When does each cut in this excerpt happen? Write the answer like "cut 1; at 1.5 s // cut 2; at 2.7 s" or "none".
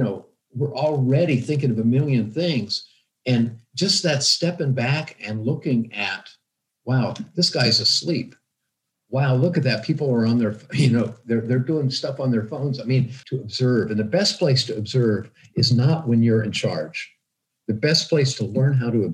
cut 1; at 13.2 s